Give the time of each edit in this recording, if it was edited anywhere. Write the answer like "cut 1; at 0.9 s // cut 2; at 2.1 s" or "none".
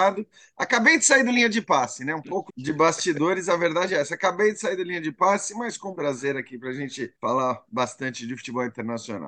cut 1; at 2.5 s // cut 2; at 5.9 s // cut 3; at 7.1 s